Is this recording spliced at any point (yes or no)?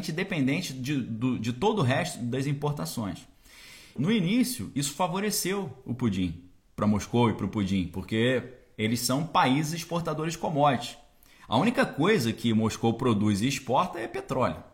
yes